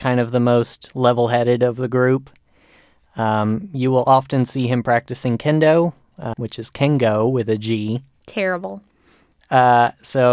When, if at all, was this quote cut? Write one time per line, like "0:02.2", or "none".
0:06.3